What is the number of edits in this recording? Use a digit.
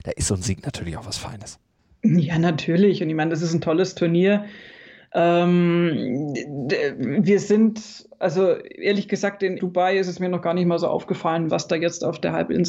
2